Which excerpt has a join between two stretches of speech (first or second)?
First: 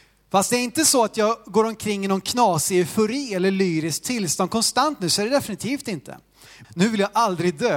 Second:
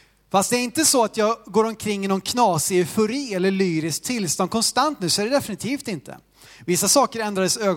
first